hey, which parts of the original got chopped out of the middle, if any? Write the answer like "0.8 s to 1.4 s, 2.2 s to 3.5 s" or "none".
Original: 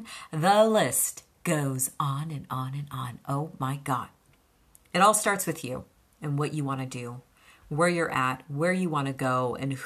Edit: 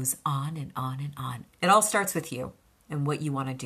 3.2 s to 4.8 s